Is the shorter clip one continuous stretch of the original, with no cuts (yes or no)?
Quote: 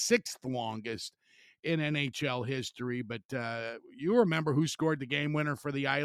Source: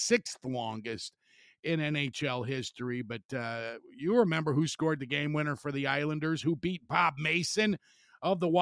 yes